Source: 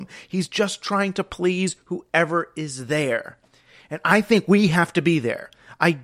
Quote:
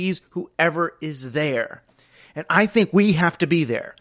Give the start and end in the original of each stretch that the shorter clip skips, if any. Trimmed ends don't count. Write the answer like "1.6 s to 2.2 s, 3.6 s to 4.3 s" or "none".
none